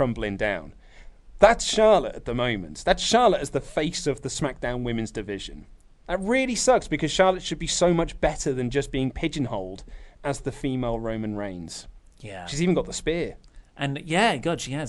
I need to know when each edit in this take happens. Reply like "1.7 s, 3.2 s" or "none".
6.0 s